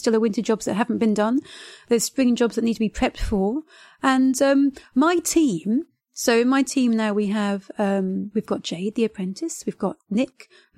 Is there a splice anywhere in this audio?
no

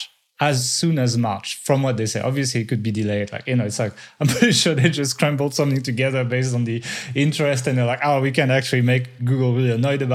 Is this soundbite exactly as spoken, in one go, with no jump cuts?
yes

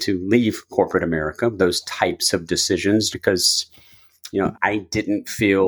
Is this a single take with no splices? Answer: no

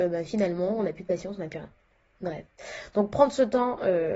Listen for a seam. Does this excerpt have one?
no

